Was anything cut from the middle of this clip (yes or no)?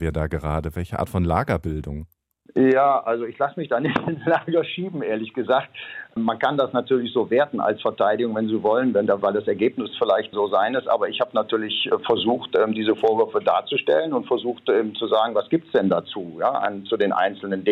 no